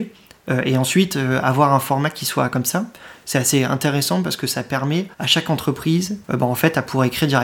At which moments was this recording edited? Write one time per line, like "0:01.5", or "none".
0:05.1
0:06.2